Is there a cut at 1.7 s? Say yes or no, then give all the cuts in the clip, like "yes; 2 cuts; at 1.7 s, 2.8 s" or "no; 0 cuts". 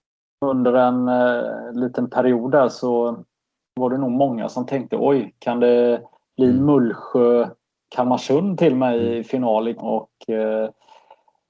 no; 1 cut; at 9.8 s